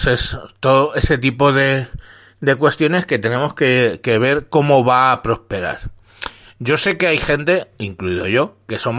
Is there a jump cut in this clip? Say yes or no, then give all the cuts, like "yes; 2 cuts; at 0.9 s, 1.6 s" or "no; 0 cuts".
no; 0 cuts